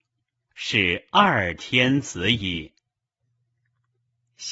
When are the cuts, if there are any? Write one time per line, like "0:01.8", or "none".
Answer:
none